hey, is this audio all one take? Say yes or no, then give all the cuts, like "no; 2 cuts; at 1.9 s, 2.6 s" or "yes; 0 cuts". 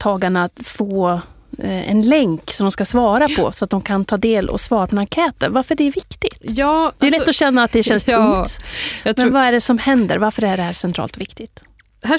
yes; 0 cuts